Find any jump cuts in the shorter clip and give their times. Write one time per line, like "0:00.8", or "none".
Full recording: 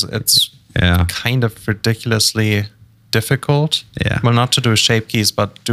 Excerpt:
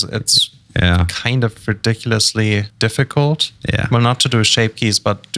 0:02.7